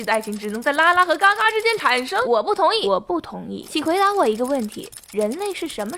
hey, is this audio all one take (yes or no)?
yes